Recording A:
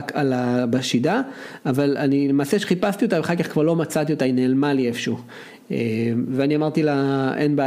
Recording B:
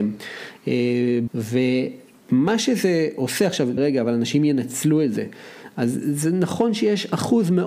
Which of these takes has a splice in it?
B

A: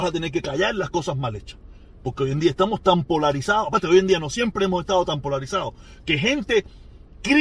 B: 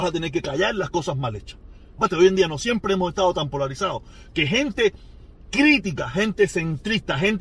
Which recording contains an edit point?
B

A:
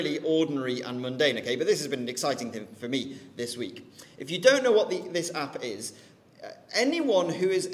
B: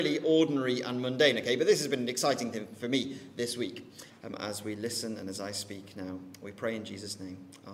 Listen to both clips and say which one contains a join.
B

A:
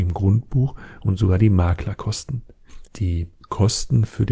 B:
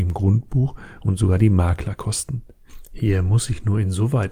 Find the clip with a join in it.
A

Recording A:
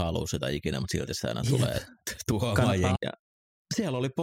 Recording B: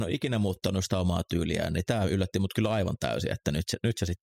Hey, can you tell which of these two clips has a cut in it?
A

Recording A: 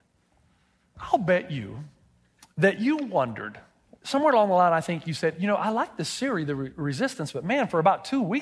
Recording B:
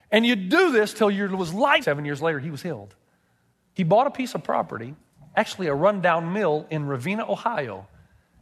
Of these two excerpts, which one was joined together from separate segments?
B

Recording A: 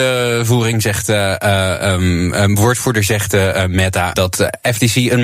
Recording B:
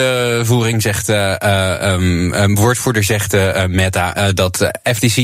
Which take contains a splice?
A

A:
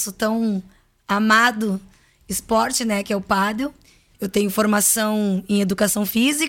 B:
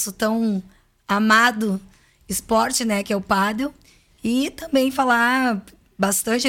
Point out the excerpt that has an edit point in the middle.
A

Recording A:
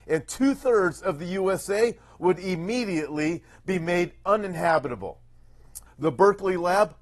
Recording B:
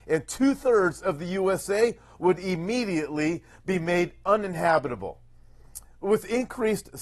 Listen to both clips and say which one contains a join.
A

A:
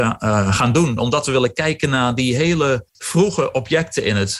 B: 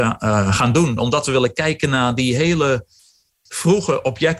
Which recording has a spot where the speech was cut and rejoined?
A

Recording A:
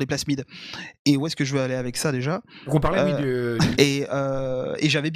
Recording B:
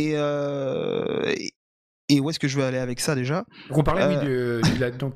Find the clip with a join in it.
A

